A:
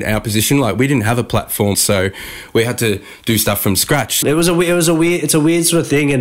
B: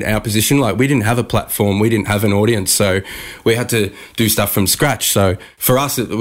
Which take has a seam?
A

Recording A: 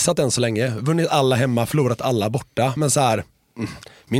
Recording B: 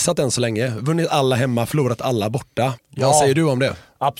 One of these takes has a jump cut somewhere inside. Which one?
B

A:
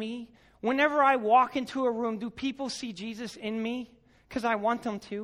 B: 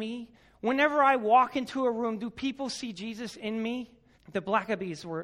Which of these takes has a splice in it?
B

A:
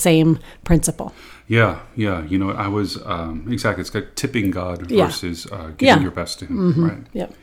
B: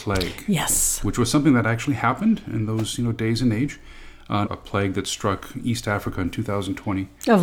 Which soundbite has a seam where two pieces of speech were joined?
B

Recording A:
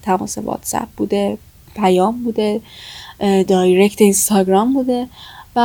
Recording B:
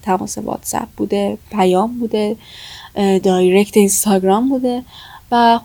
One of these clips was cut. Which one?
B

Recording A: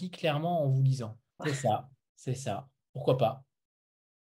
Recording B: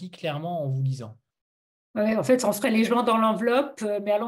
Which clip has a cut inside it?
A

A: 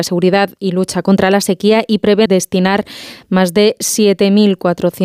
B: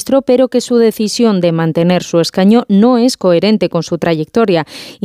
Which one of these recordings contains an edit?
A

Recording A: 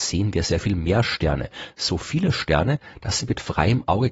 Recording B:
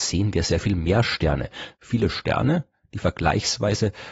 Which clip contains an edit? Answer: B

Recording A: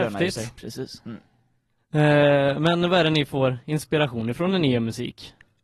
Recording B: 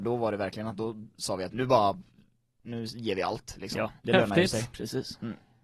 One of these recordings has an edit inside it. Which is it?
B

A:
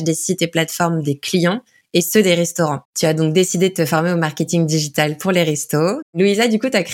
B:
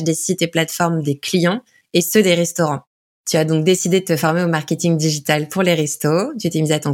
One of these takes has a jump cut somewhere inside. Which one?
A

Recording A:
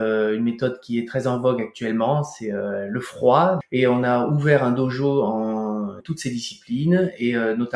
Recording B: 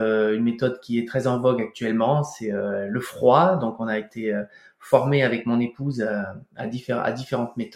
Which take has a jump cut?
A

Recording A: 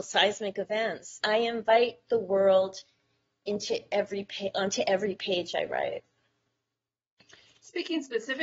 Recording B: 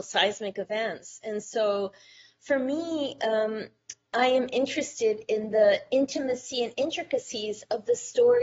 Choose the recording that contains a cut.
A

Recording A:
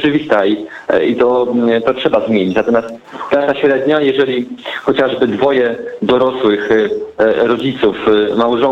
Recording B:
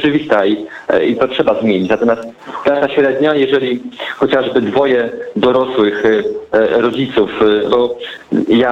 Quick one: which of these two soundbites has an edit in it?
B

